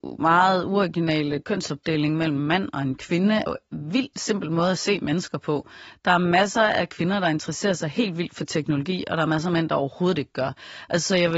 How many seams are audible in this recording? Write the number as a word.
one